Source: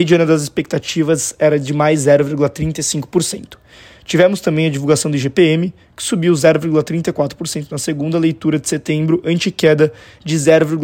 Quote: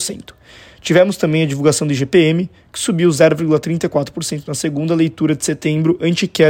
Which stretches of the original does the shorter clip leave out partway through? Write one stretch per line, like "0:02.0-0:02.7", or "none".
none